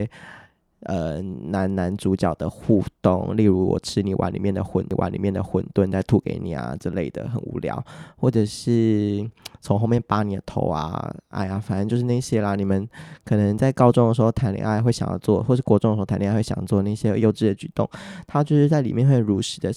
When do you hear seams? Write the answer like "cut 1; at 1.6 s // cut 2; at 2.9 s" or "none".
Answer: none